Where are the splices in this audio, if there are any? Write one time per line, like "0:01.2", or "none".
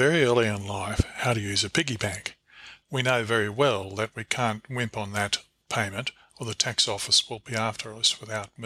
0:02.8